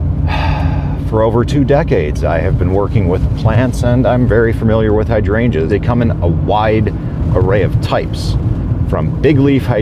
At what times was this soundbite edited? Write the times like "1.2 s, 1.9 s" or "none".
5.7 s